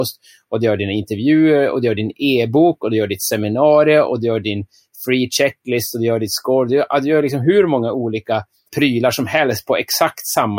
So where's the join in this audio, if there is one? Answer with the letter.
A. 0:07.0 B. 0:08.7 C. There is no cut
B